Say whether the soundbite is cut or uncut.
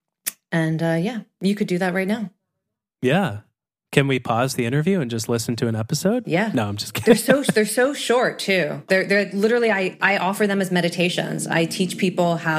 uncut